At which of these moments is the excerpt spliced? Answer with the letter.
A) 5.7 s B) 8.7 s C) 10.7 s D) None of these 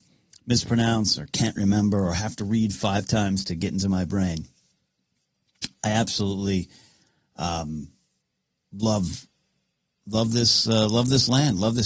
D